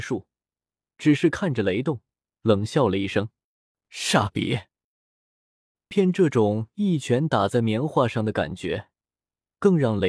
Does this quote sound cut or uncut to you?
cut